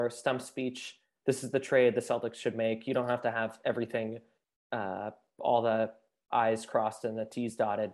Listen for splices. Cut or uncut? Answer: uncut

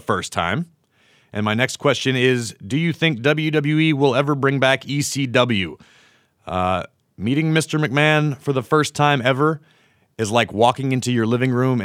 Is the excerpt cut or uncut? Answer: uncut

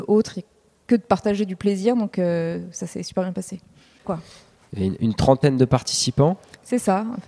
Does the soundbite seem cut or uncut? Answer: cut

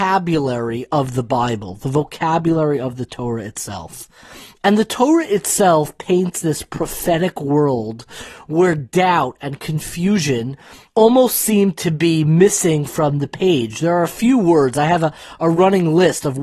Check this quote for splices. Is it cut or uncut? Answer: uncut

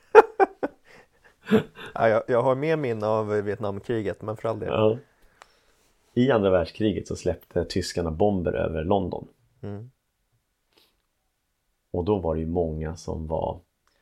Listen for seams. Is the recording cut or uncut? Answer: uncut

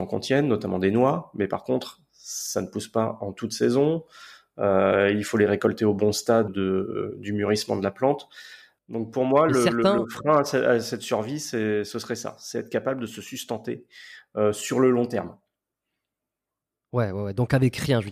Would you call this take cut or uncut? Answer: cut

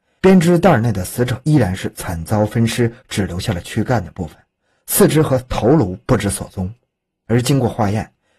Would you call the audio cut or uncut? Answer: uncut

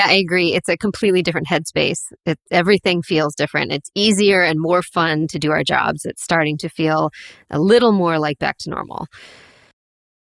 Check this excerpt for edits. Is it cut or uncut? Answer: uncut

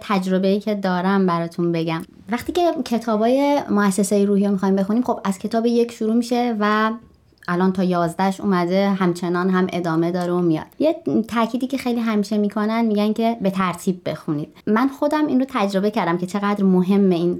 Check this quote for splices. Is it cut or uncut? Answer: cut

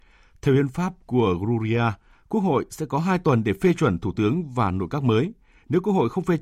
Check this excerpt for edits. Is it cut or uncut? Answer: uncut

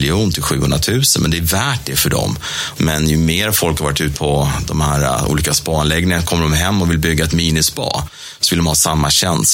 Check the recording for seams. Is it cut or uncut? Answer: cut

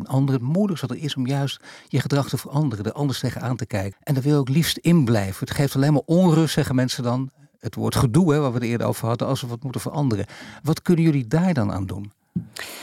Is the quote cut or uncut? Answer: cut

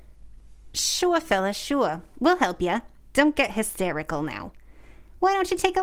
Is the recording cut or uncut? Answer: uncut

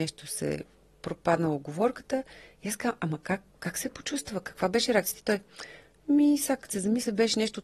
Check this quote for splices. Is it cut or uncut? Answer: uncut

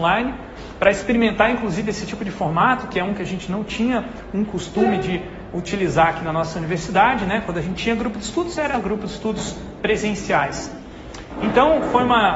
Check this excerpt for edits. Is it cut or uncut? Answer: uncut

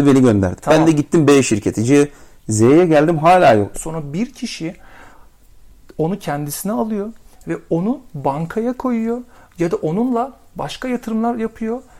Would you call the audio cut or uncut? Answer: cut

